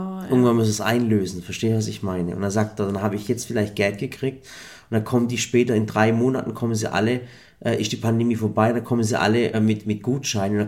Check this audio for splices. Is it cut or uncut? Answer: cut